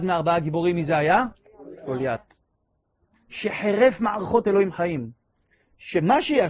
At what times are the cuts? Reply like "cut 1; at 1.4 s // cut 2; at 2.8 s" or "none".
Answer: none